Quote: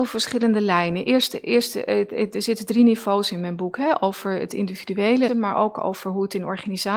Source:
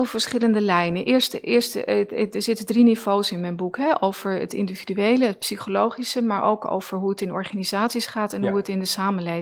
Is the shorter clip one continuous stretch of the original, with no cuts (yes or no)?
no